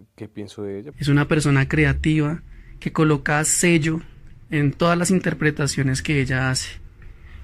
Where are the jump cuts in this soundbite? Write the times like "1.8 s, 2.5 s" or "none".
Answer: 0.9 s

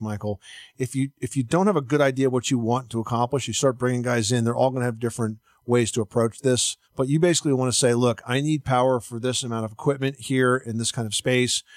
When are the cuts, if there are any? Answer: 6.8 s

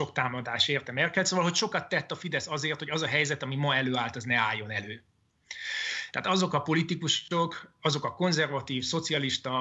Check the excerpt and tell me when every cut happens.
6.1 s

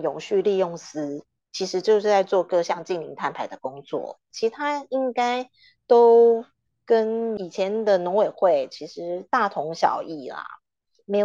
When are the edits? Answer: 4.3 s

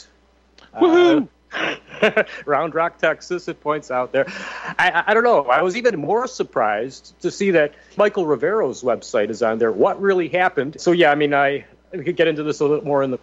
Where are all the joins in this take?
8.0 s, 10.8 s

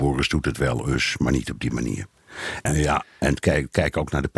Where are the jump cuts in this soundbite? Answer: 2.7 s

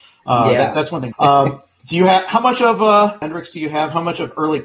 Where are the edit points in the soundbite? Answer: 1.1 s, 3.2 s

